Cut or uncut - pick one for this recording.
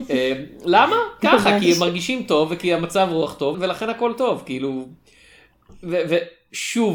cut